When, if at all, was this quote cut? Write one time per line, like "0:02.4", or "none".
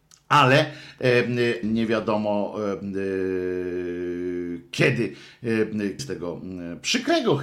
0:01.6
0:06.0